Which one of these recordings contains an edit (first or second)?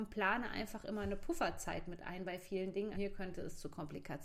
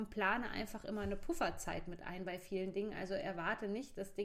first